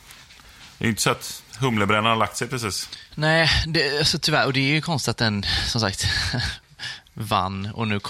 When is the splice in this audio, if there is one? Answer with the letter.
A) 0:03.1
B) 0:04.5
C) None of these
C